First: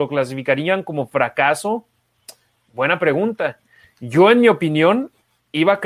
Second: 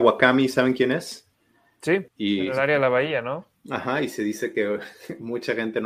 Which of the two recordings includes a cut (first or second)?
second